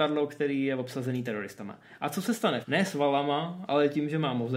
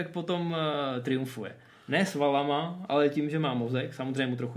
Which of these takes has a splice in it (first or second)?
first